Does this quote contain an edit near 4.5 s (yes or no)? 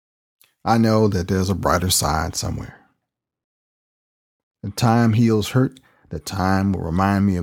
no